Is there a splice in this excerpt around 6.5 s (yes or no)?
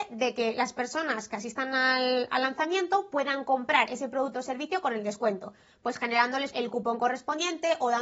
yes